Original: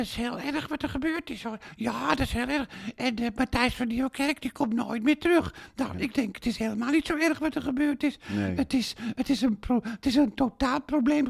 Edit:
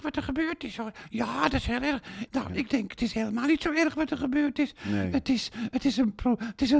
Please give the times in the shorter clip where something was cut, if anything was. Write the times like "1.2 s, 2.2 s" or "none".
2.3 s